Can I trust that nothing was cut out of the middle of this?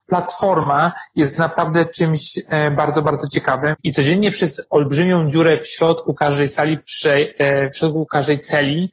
no; 1 cut; at 3.7 s

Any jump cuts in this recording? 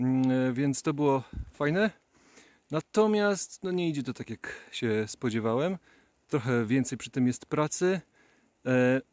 no; 0 cuts

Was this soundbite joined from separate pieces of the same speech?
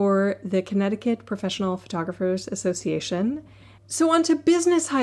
yes; 1 cut; at 3.8 s

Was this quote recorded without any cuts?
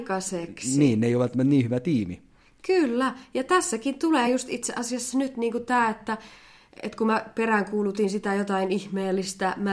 yes; 0 cuts

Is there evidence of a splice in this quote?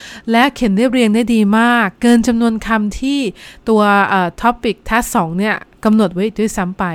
no; 0 cuts

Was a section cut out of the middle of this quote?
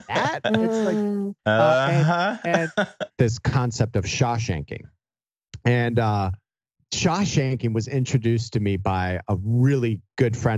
yes; 1 cut; at 3.1 s

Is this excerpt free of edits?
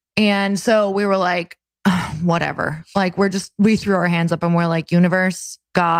yes; 0 cuts

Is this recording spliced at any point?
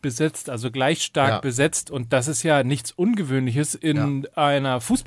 no; 0 cuts

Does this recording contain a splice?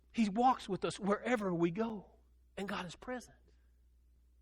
yes; 1 cut; at 2.4 s

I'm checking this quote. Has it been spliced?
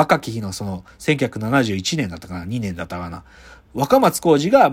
no; 0 cuts

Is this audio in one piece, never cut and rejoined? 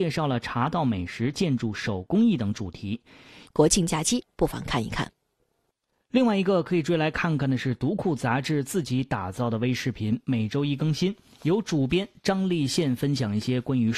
no; 1 cut; at 3.4 s

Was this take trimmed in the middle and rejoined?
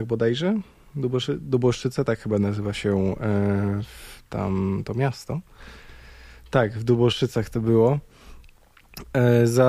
no; 0 cuts

